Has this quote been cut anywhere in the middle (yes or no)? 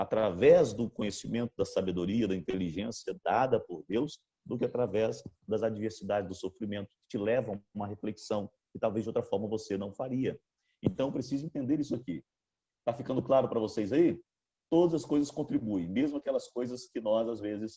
no